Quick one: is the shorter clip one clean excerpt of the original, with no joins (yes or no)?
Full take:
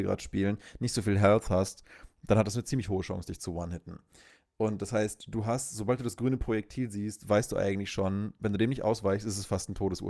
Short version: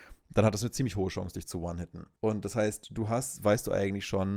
no